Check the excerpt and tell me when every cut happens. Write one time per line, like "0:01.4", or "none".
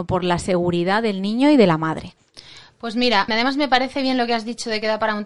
0:03.3